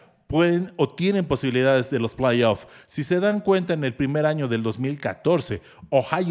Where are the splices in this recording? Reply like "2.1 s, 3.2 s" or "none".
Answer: none